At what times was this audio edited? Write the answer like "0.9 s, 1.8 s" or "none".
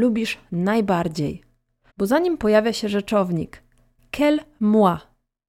1.9 s

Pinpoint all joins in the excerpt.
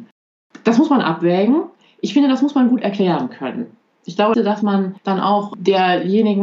4.3 s

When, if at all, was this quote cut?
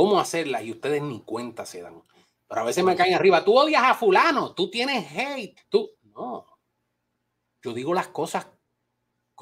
5.6 s

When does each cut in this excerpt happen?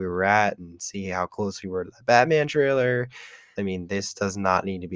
3.6 s

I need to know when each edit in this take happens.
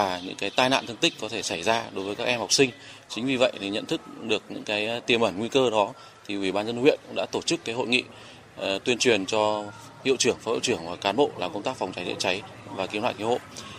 none

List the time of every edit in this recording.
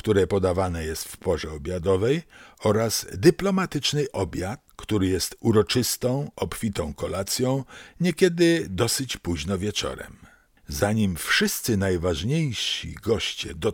none

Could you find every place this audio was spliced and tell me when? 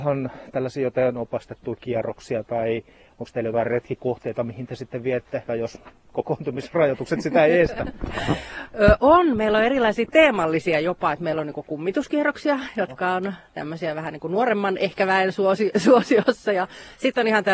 5.5 s

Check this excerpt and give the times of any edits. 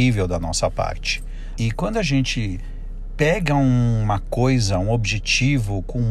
1.6 s

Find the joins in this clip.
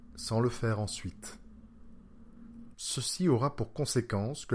2.7 s

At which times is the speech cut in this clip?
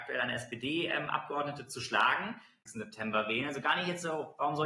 2.7 s

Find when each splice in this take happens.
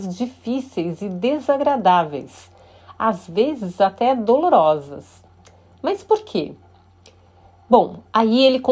none

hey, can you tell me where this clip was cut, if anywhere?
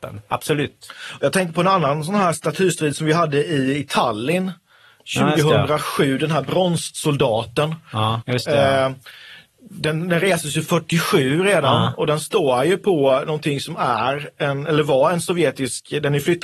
8.2 s

